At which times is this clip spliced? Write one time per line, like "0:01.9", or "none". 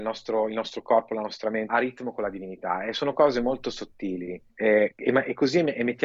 0:01.7
0:04.5

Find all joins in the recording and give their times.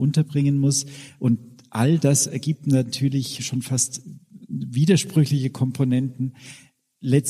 0:01.2

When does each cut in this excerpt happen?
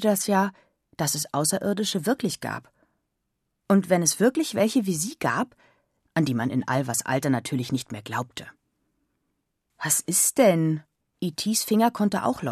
0:06.1
0:11.0

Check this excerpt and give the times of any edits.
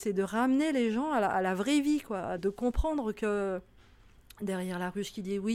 0:02.4

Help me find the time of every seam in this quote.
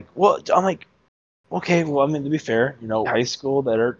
0:03.1

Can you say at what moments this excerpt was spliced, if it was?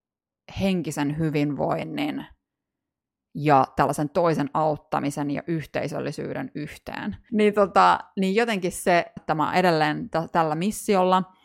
0:07.3
0:09.2

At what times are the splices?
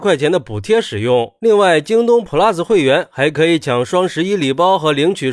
none

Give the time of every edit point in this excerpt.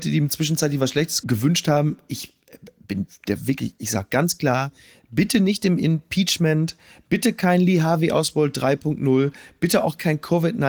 none

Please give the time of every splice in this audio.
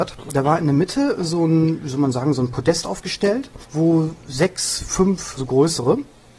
0:03.6
0:05.4

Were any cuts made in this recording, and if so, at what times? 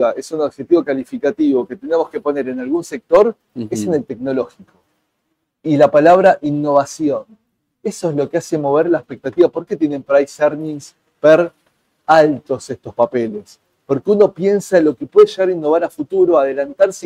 none

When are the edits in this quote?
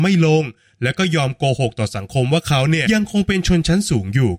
0:02.9

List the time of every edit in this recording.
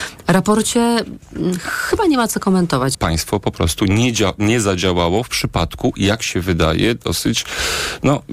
0:02.9

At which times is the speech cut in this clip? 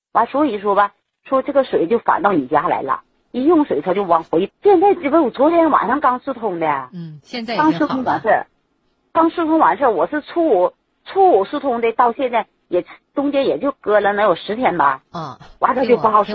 0:04.5

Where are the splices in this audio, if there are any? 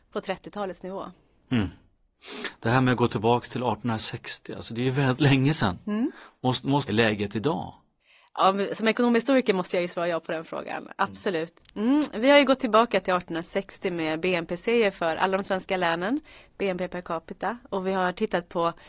0:06.9
0:11.6

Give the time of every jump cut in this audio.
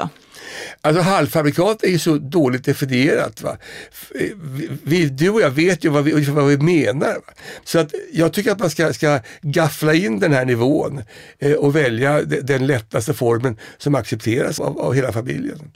0:07.6
0:14.6

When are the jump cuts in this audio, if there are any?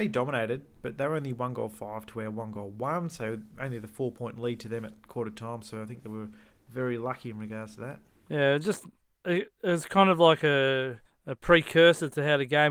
none

